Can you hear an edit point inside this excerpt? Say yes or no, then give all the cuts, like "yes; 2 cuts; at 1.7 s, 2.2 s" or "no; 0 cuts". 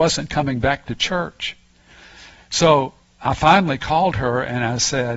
no; 0 cuts